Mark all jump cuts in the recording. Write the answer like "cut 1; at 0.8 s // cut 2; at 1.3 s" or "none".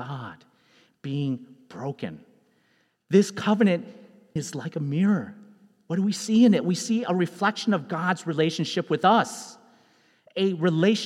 cut 1; at 4.4 s